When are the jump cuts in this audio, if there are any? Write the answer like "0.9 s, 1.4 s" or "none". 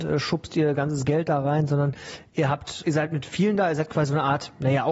2.8 s